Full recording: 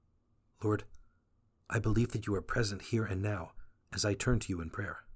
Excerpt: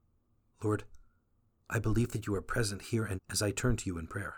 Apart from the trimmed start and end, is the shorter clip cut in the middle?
yes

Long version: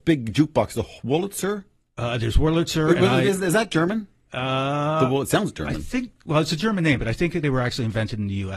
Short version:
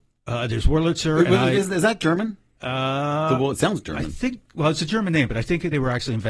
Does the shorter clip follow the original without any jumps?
yes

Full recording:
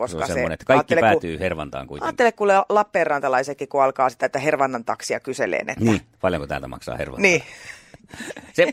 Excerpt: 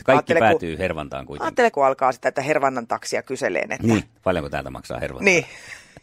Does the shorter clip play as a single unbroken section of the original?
no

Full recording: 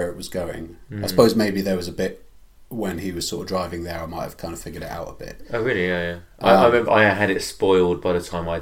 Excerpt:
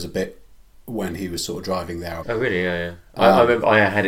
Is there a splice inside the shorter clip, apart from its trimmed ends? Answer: yes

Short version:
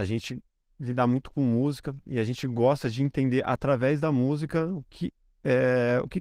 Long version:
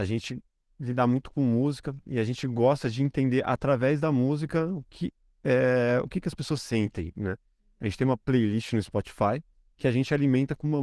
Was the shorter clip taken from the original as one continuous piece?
yes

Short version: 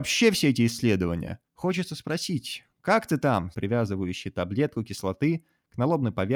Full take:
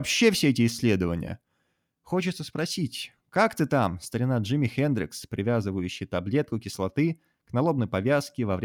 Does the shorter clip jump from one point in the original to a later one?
yes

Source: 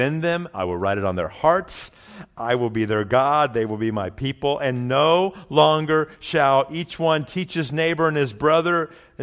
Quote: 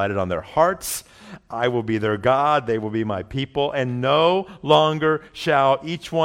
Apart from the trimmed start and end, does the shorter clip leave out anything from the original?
no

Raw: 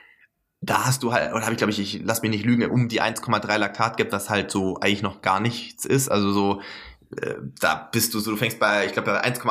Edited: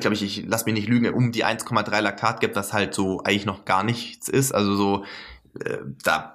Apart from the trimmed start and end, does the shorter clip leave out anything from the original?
no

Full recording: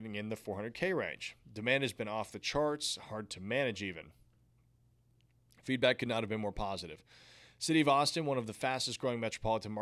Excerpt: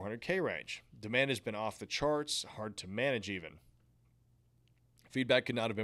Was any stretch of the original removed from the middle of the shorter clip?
no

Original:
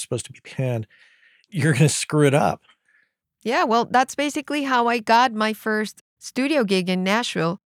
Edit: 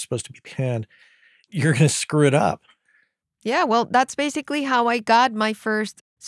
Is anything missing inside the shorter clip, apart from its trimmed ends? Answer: no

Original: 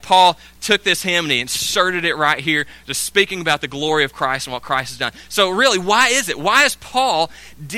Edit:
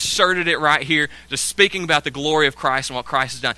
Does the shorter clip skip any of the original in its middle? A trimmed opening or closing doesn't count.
no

